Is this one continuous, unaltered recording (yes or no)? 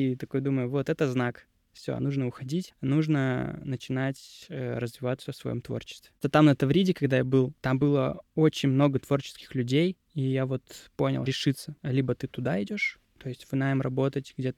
no